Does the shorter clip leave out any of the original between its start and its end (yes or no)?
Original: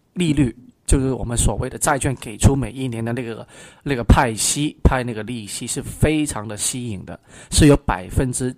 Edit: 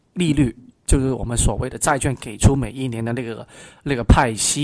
no